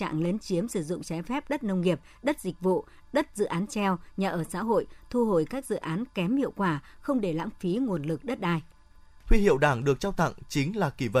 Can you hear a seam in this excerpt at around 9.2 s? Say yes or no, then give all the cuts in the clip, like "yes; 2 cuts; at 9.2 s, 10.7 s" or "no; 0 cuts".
yes; 1 cut; at 9.2 s